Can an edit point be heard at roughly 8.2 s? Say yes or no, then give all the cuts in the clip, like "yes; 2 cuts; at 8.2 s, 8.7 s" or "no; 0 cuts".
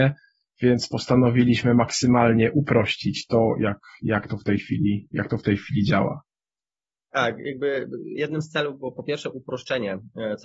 yes; 1 cut; at 8.2 s